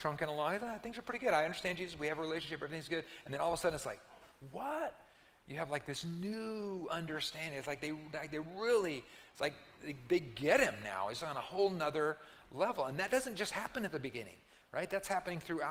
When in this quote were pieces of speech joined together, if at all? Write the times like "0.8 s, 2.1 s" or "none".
none